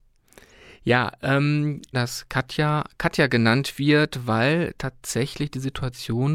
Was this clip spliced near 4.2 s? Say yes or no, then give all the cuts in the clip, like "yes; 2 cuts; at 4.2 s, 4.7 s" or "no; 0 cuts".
no; 1 cut; at 1.9 s